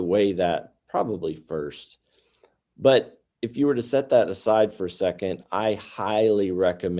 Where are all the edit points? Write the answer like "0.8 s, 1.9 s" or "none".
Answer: none